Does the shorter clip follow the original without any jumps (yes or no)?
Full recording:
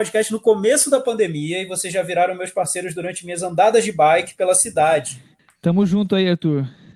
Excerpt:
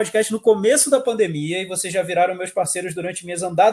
yes